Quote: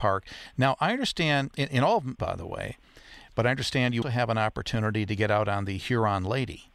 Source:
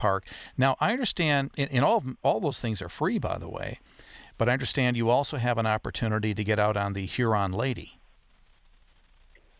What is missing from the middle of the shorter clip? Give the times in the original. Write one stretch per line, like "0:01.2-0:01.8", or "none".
0:02.2-0:03.2
0:05.0-0:05.3